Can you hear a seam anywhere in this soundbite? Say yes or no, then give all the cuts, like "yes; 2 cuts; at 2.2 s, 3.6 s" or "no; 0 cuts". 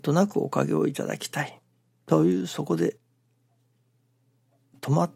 no; 0 cuts